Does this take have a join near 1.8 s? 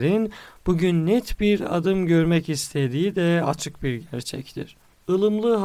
no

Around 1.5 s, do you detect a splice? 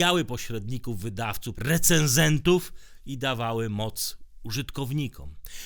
yes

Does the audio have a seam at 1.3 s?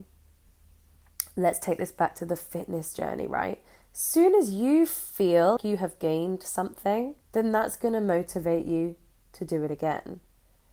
no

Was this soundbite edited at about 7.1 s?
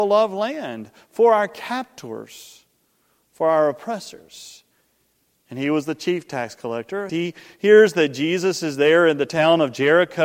yes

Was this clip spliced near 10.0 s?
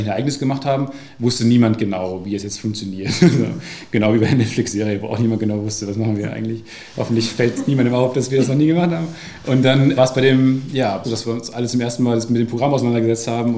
yes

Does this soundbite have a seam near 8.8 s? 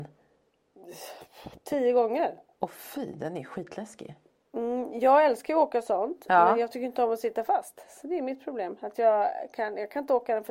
no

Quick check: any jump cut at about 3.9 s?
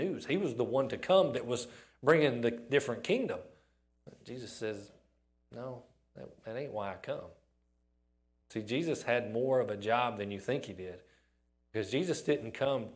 no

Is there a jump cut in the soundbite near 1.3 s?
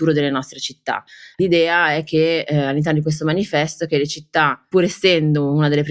yes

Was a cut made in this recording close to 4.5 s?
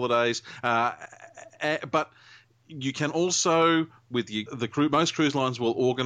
yes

